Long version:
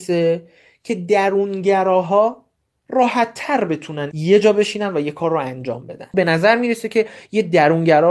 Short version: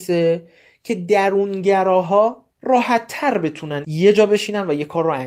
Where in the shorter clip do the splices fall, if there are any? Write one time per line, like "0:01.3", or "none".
0:02.5